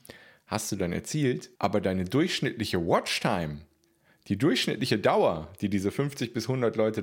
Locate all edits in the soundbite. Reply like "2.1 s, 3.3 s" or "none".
1.6 s

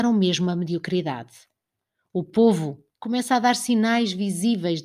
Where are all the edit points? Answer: 2.9 s

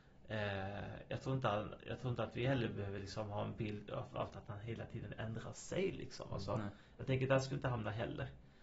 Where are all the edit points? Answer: none

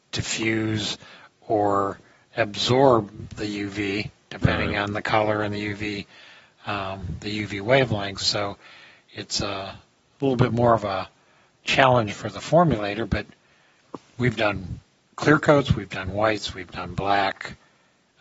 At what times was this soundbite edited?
none

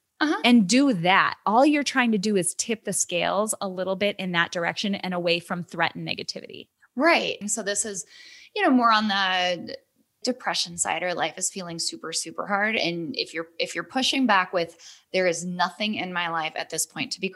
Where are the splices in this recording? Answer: 7.4 s, 10.2 s

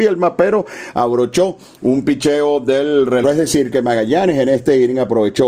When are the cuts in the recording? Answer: 3.2 s

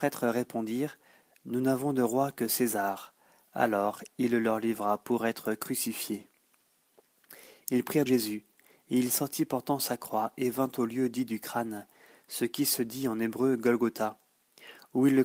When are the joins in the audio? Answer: 8.1 s

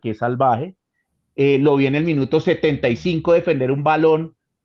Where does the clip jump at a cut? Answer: none

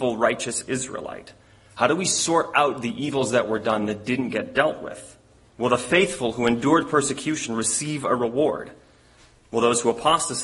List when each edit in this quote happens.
5.5 s

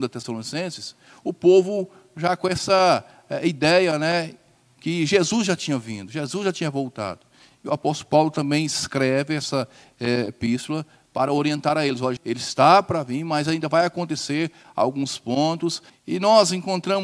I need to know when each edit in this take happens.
12.2 s, 15.9 s

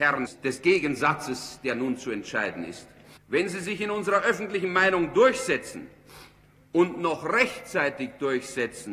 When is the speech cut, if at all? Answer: 3.2 s

